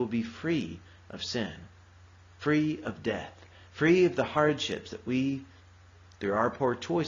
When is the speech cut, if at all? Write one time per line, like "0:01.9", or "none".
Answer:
none